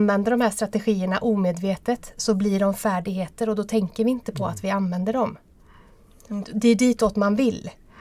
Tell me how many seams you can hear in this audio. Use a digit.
1